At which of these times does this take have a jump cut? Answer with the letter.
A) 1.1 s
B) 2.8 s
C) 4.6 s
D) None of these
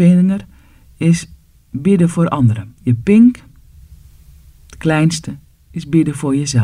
B